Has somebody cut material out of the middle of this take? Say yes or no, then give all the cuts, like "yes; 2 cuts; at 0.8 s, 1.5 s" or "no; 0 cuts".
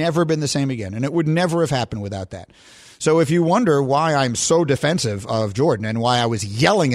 no; 0 cuts